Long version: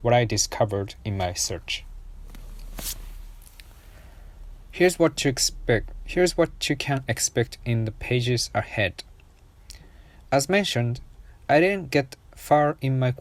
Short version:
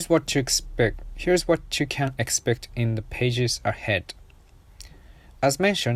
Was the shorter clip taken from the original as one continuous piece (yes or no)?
yes